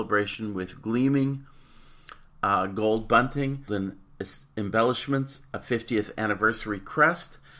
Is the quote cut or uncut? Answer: cut